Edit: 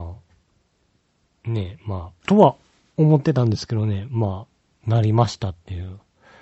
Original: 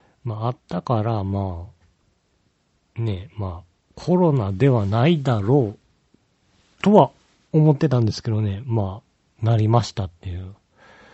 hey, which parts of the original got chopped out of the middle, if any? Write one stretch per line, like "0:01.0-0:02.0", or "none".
0:03.7-0:06.8